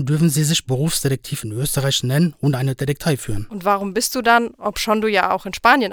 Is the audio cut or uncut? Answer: uncut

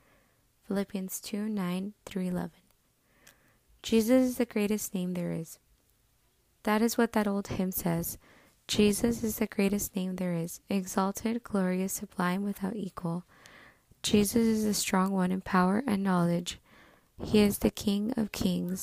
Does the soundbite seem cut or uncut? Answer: uncut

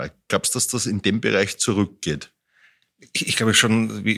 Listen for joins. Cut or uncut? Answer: uncut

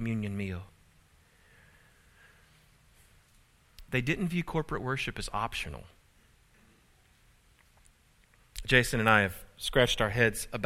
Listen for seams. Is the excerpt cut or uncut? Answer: uncut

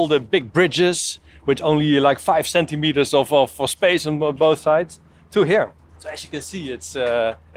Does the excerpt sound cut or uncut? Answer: cut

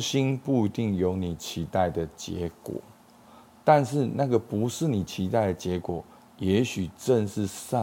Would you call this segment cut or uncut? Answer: uncut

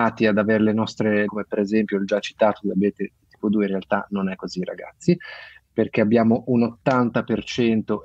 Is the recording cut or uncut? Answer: cut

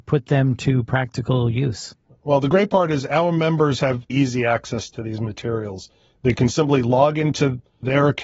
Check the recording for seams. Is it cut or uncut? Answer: cut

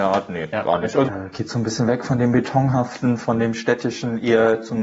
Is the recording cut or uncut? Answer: cut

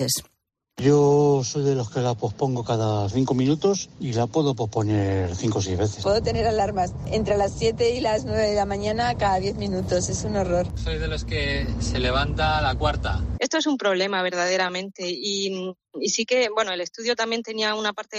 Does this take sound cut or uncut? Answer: cut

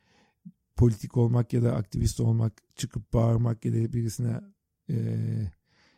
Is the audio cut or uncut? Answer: uncut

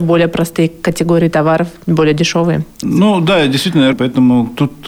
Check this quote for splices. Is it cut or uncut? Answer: cut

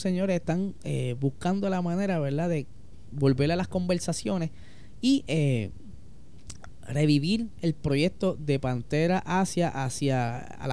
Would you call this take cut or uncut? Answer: uncut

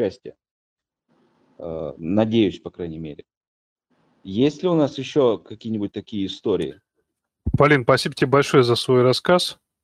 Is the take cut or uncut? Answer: uncut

